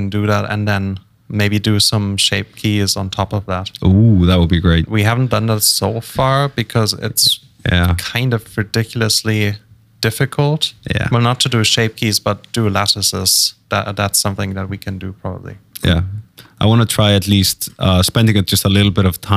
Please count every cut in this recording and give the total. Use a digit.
0